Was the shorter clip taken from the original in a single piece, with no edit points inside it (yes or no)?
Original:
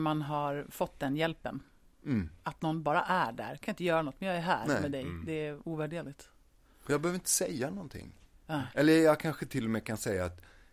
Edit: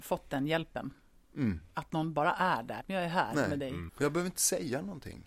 no